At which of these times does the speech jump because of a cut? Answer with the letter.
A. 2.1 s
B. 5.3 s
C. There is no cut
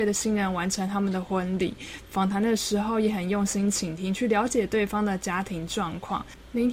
C